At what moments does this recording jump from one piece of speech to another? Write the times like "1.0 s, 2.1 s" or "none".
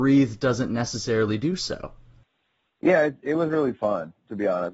none

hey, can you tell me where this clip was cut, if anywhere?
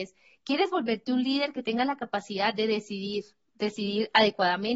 none

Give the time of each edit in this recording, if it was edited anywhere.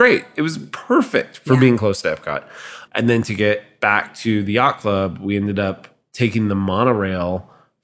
2.9 s

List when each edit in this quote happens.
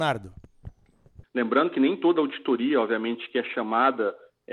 1.2 s

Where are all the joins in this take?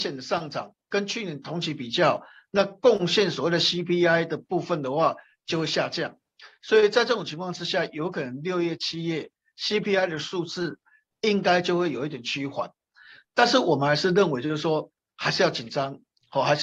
none

